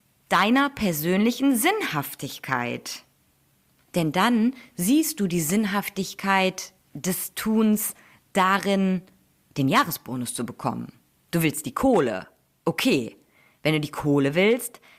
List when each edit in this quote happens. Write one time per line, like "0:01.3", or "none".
none